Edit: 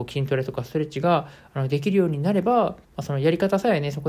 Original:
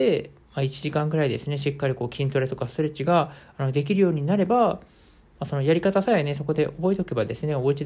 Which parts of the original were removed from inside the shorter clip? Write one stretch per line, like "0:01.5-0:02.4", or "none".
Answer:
0:04.9-0:05.3